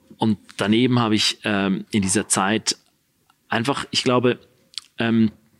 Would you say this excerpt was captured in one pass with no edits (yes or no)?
yes